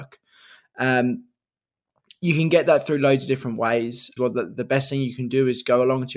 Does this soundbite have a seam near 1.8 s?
no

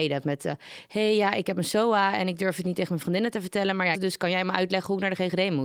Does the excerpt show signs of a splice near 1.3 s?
no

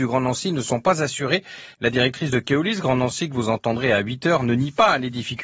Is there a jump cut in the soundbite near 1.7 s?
yes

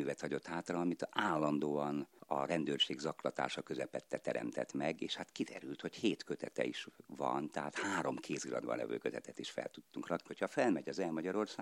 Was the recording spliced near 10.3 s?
yes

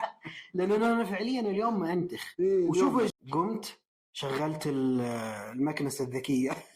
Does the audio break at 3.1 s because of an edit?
yes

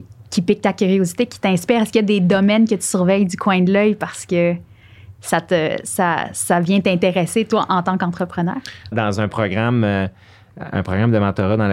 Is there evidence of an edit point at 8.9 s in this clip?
yes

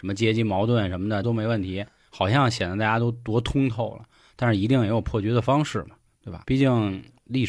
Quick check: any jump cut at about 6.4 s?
yes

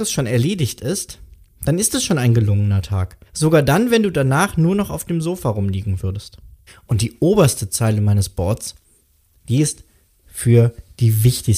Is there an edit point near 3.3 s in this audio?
yes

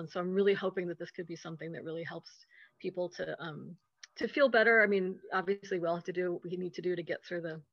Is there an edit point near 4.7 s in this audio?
no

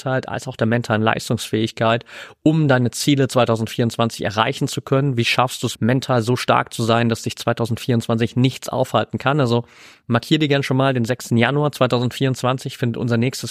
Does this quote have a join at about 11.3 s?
yes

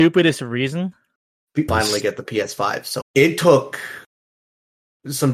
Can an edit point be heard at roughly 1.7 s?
yes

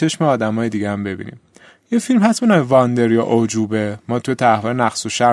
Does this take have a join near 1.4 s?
no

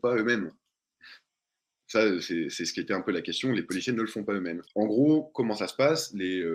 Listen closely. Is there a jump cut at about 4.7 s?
yes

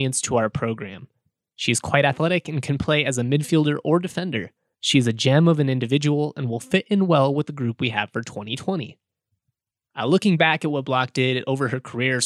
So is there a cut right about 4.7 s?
yes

